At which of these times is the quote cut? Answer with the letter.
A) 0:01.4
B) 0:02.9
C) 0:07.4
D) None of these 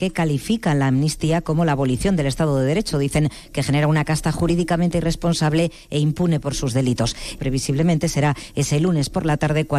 C